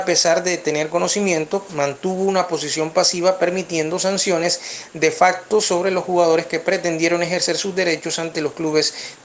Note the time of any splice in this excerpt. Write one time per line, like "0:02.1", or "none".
0:01.7

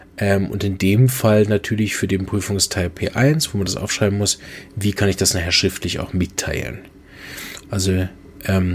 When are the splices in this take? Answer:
0:07.6

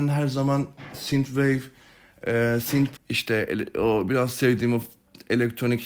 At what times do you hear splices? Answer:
0:03.0

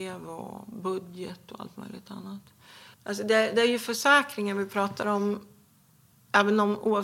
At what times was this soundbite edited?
0:02.9

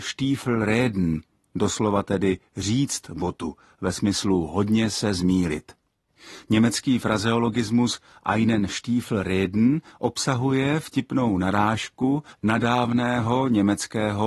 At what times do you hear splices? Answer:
none

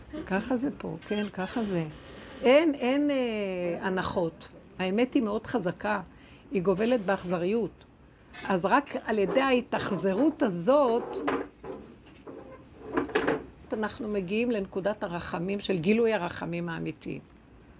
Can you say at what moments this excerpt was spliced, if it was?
0:13.7

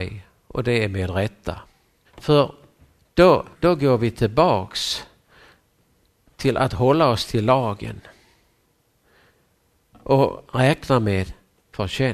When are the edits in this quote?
0:02.0
0:03.5

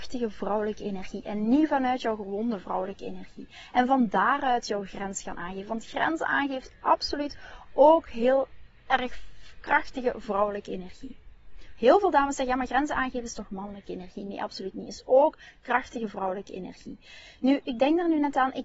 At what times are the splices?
none

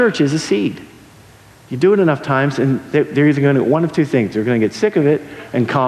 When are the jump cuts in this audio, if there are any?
none

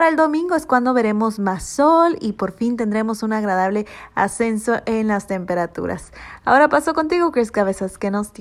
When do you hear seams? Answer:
none

